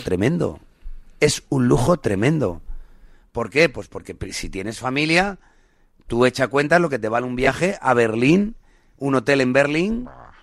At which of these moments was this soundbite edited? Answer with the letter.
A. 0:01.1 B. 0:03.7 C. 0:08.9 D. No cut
D